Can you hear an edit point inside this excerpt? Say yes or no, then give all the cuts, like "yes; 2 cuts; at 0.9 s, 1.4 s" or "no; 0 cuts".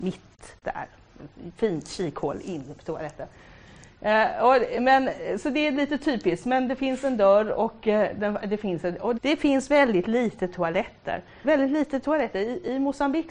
yes; 2 cuts; at 9.2 s, 11.4 s